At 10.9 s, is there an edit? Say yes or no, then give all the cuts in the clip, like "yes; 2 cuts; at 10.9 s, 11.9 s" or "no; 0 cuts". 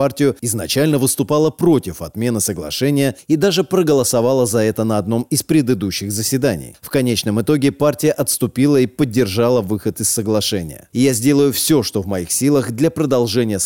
yes; 1 cut; at 10.9 s